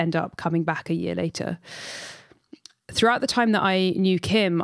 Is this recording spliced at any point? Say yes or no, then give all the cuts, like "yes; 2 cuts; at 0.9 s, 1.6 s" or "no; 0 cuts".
no; 0 cuts